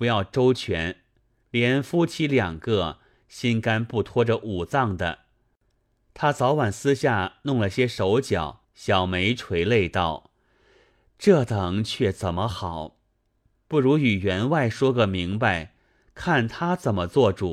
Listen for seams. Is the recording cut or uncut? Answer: cut